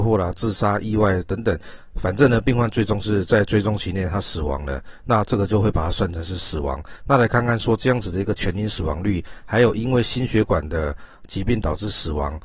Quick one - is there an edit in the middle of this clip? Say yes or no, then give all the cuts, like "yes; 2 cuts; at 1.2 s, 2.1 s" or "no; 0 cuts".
no; 0 cuts